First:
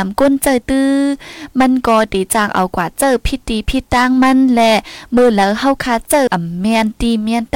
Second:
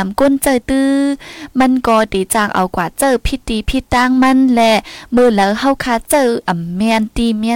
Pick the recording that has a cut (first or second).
first